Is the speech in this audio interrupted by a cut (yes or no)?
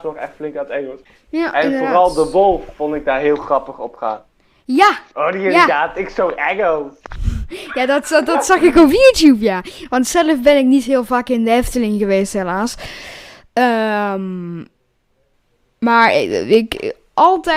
no